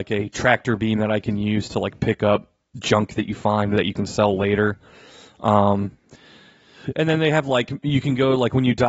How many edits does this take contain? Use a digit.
0